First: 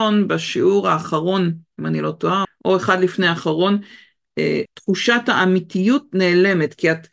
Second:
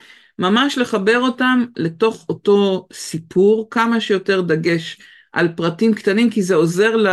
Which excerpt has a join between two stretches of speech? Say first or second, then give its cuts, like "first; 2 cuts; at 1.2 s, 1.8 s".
first; 2 cuts; at 2.4 s, 4.7 s